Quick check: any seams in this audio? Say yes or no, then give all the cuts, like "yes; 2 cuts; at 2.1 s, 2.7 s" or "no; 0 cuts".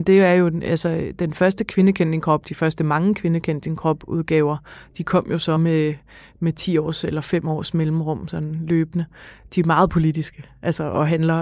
no; 0 cuts